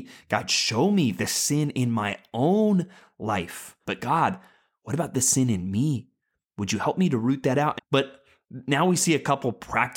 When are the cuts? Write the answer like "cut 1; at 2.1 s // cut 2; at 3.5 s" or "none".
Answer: cut 1; at 3.8 s // cut 2; at 7.8 s